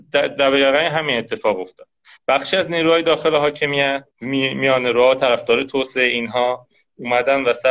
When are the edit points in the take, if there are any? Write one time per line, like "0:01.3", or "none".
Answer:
0:04.1